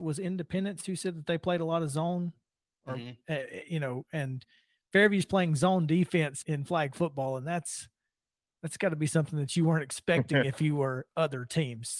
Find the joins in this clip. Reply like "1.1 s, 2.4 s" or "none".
6.4 s